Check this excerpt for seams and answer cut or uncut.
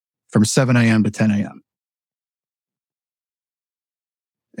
uncut